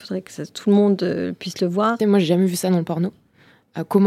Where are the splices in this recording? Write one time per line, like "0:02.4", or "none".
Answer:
0:02.0